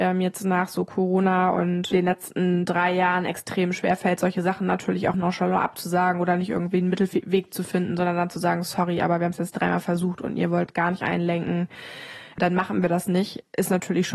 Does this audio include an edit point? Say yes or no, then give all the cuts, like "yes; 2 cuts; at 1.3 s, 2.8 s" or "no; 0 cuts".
yes; 1 cut; at 5.1 s